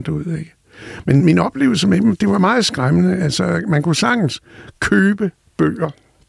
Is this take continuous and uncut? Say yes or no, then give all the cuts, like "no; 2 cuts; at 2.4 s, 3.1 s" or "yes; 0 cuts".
no; 1 cut; at 1.2 s